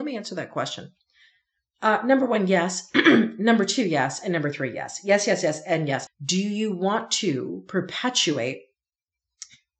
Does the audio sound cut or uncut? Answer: cut